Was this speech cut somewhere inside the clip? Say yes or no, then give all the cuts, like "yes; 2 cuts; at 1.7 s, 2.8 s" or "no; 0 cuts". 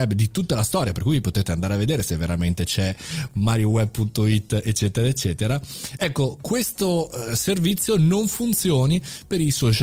no; 0 cuts